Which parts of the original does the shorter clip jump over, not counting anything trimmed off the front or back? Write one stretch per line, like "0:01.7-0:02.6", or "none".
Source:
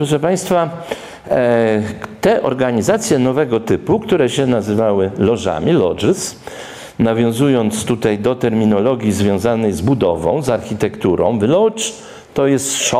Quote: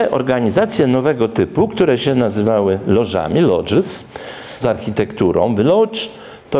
0:06.9-0:10.4